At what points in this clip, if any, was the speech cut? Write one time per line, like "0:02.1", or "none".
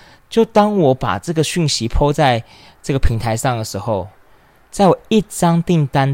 none